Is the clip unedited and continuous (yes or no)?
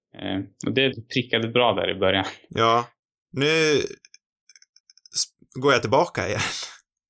no